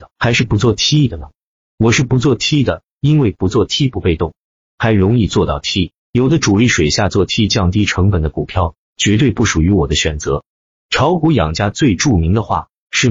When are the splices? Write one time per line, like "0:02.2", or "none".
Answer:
0:06.0